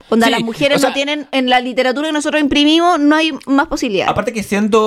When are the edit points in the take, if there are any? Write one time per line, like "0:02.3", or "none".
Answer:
none